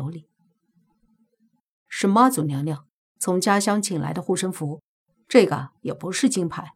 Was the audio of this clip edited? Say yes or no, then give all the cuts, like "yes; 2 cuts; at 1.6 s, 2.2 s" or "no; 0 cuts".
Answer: no; 0 cuts